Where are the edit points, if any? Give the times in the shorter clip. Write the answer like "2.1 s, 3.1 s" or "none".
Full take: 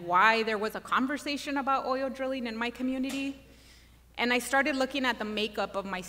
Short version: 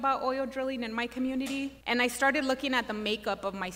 1.8 s